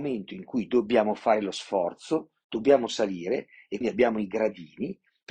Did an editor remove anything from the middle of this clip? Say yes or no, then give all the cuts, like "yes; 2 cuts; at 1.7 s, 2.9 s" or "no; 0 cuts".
yes; 1 cut; at 3.8 s